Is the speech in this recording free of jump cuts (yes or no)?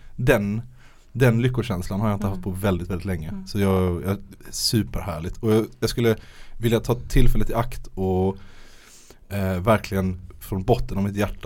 yes